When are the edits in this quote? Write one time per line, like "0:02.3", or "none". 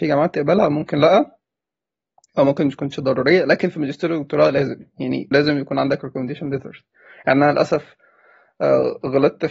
0:05.3